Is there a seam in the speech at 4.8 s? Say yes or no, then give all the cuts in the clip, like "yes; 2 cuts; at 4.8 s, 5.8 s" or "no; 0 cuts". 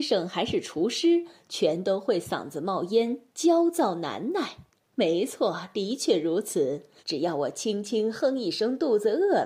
yes; 2 cuts; at 4.8 s, 7.0 s